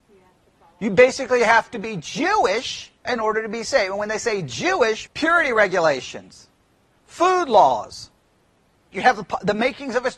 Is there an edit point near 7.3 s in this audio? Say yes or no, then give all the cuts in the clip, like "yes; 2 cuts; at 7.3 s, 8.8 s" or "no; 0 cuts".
no; 3 cuts; at 3.0 s, 5.1 s, 8.9 s